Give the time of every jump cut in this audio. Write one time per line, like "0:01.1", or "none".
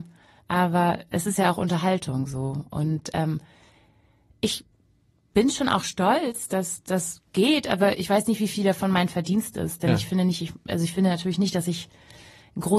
none